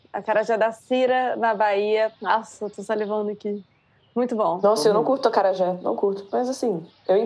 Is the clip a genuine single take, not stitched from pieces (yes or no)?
no